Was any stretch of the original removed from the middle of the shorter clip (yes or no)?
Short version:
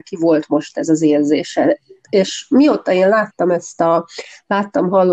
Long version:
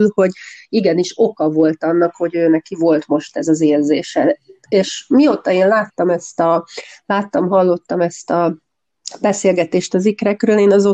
no